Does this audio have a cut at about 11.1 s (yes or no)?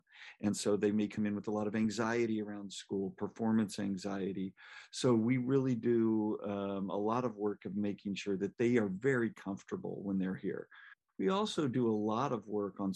yes